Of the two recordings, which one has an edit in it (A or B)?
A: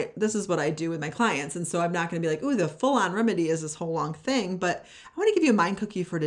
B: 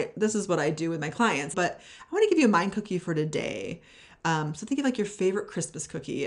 B